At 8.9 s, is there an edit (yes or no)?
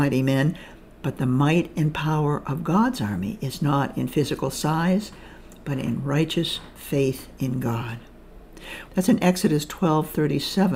yes